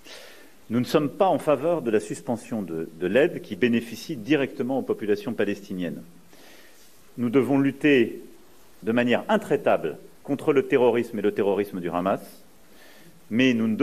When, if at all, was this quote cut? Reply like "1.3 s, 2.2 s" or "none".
7.1 s, 10.1 s